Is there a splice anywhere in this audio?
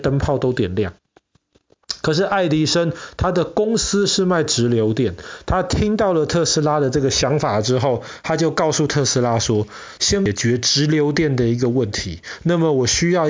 yes; 1 cut; at 10.0 s

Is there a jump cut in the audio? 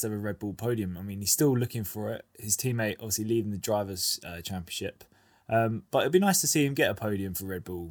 no; 0 cuts

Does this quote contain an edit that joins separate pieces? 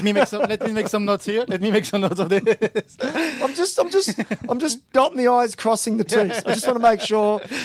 no; 0 cuts

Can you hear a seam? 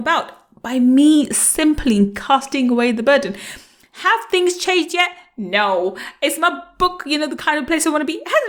no; 0 cuts

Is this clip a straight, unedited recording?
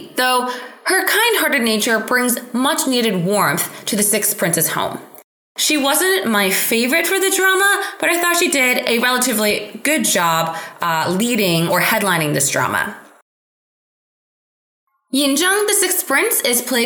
no; 1 cut; at 5.6 s

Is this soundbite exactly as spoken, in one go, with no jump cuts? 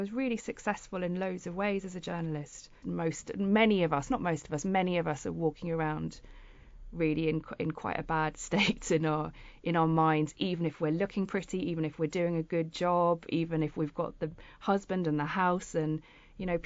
no; 1 cut; at 2.8 s

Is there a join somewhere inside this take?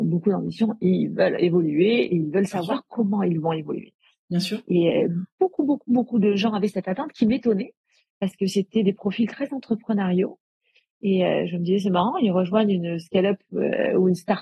no; 0 cuts

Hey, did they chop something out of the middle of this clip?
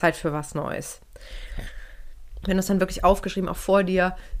yes; 1 cut; at 2.4 s

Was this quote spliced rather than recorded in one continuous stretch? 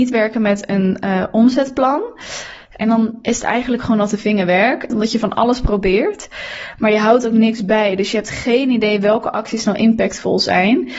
yes; 1 cut; at 4.9 s

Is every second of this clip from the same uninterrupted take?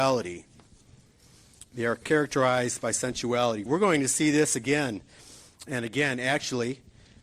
no; 1 cut; at 3.7 s

